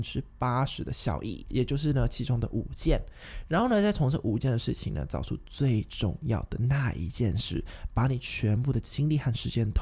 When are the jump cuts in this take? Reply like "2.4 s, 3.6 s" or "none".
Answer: none